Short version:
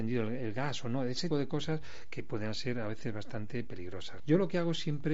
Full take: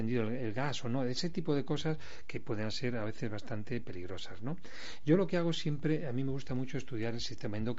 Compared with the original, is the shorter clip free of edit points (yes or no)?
no